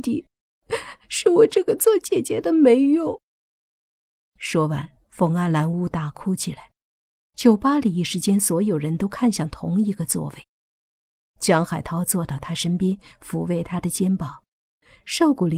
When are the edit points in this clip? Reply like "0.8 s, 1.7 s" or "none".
5.7 s